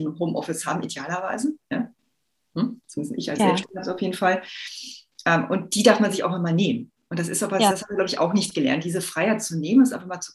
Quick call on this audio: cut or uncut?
uncut